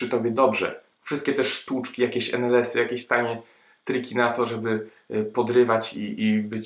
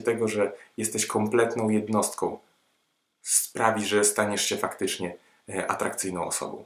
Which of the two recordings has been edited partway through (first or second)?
first